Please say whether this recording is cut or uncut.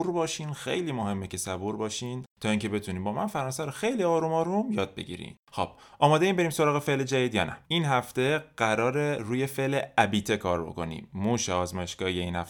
cut